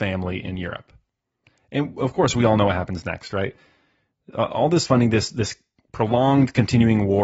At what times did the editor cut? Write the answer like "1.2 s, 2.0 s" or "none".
none